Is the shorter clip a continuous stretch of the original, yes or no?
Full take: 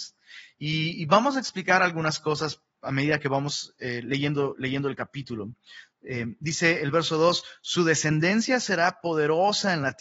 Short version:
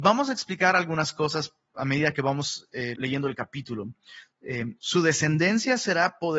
no